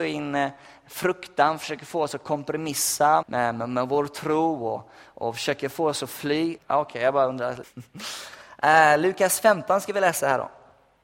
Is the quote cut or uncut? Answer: cut